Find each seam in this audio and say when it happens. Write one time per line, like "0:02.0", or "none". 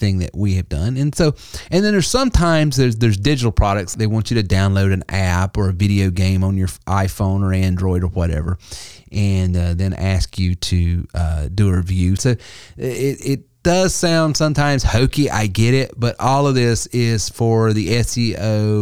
0:03.9
0:12.2